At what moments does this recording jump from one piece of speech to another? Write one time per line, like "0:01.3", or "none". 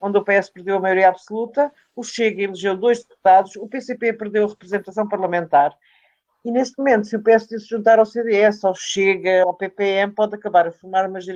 0:09.4